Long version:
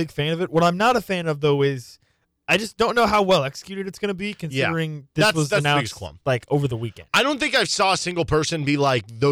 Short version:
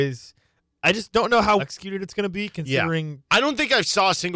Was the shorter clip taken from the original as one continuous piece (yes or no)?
no